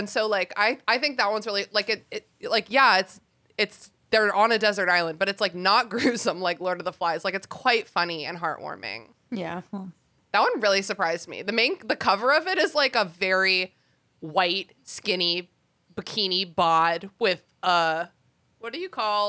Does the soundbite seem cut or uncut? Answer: uncut